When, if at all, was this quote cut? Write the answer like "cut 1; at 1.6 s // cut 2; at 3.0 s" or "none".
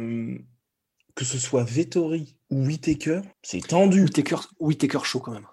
cut 1; at 3.3 s